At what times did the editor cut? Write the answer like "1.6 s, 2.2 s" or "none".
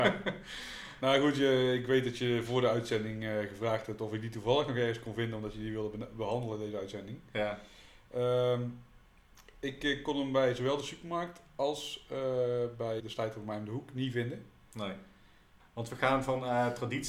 13.0 s, 15.6 s